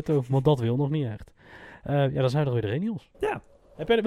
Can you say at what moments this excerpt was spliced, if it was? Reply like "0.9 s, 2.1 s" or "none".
3.1 s